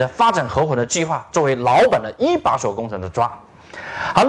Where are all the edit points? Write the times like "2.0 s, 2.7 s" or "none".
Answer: none